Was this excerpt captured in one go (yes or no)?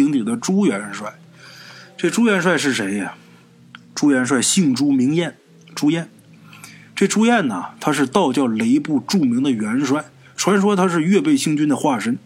yes